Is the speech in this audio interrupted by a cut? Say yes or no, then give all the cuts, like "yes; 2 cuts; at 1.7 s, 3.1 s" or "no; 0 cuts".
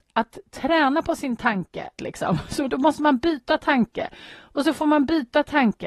yes; 1 cut; at 2.0 s